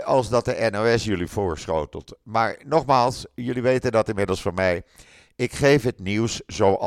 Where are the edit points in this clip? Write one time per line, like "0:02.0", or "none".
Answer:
none